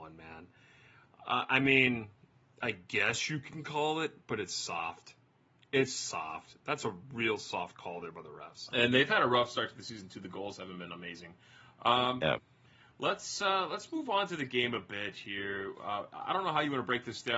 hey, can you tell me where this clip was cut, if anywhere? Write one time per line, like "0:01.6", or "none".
0:08.7